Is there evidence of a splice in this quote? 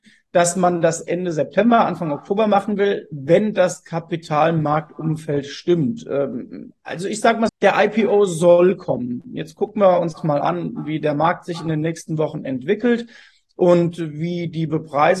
yes; 1 cut; at 7.5 s

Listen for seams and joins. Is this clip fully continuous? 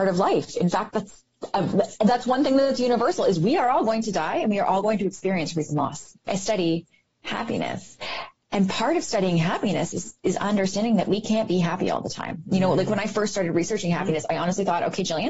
no; 1 cut; at 6.3 s

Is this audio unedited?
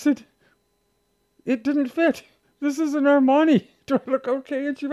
yes; 0 cuts

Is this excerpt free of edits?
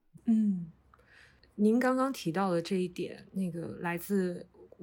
yes; 0 cuts

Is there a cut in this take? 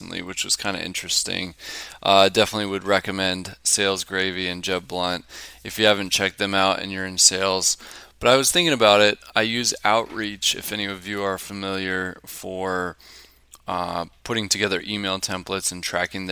no; 0 cuts

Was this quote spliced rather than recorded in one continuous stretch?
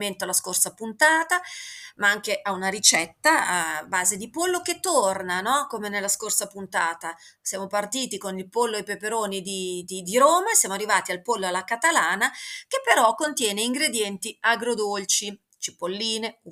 no; 0 cuts

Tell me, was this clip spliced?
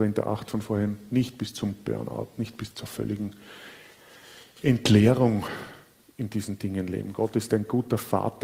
yes; 1 cut; at 2.7 s

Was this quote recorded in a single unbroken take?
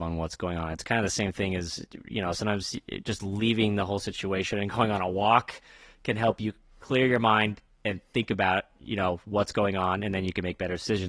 yes; 0 cuts

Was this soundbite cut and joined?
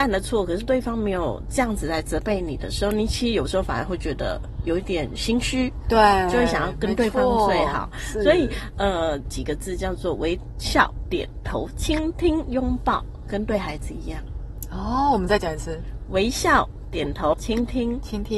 yes; 2 cuts; at 9.3 s, 17.3 s

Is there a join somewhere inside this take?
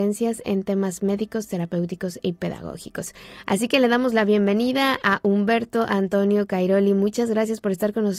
no; 0 cuts

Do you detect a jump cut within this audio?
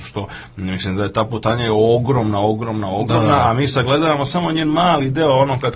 no; 0 cuts

